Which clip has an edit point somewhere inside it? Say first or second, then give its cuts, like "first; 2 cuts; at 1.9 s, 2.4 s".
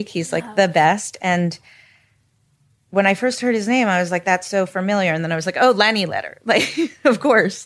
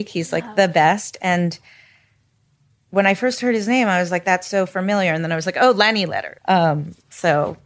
second; 1 cut; at 6.4 s